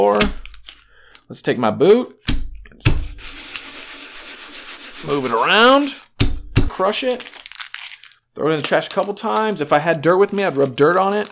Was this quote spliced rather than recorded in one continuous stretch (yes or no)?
yes